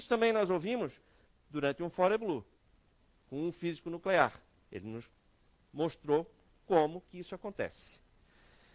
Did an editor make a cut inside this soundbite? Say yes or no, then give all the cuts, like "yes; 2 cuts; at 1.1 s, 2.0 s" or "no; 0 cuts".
no; 0 cuts